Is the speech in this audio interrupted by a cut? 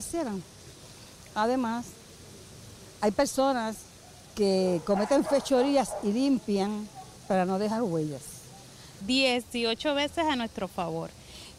yes; 1 cut; at 9.0 s

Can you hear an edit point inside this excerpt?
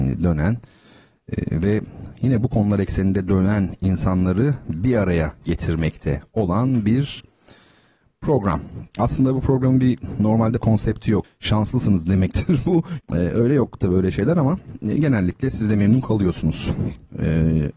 yes; 2 cuts; at 11.2 s, 13.0 s

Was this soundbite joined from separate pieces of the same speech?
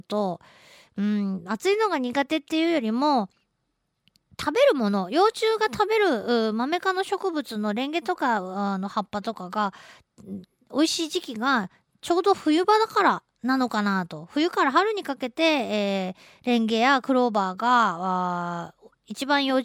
no; 0 cuts

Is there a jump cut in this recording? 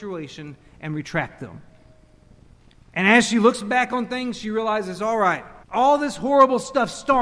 yes; 1 cut; at 5.6 s

